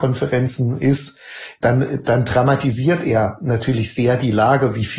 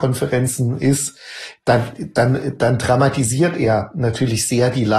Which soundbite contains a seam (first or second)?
first